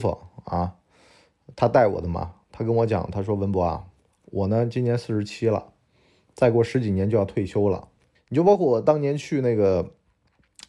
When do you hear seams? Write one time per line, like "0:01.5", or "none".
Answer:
0:08.1